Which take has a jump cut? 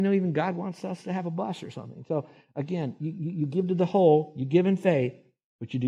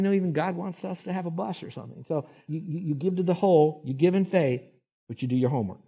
second; 1 cut; at 2.5 s

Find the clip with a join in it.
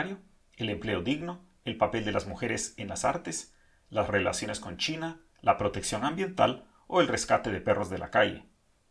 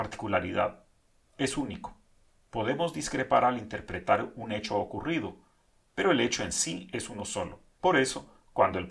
second; 1 cut; at 7.7 s

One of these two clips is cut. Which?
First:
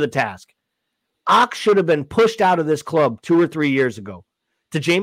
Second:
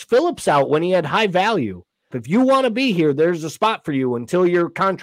second; 1 cut; at 2.1 s

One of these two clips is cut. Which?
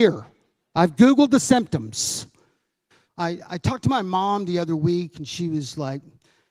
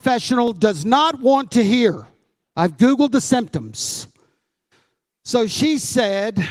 first; 1 cut; at 3.1 s

